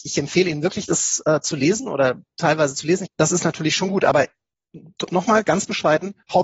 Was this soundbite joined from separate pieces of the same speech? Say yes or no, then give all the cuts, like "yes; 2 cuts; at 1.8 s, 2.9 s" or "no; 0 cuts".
yes; 1 cut; at 3.1 s